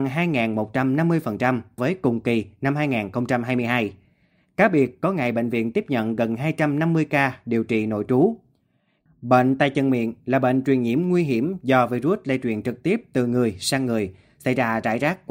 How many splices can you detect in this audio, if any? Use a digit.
2